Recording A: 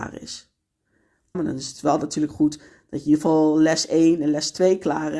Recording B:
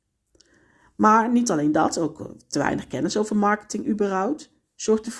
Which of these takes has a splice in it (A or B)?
A